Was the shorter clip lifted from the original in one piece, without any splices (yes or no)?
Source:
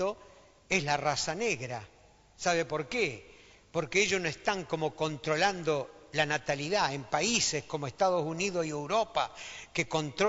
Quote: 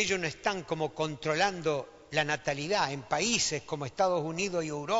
yes